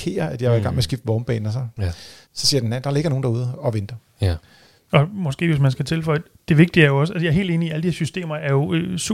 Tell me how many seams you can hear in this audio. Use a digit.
0